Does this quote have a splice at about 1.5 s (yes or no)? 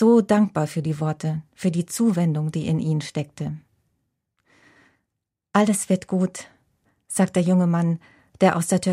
no